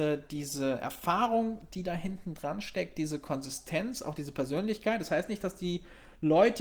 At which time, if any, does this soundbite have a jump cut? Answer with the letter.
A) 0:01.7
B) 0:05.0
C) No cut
C